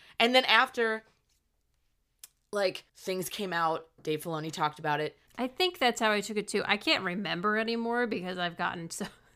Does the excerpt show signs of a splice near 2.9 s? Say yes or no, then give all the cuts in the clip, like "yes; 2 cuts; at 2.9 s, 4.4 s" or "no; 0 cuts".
yes; 2 cuts; at 2.9 s, 5.3 s